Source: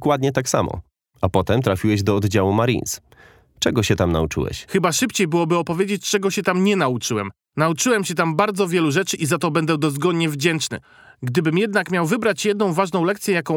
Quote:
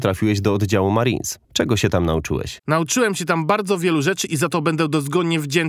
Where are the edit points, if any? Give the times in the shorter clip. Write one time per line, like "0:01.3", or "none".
0:01.4
0:02.6